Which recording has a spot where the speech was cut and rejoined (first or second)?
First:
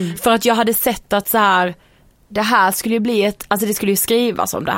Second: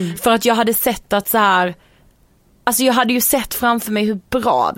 first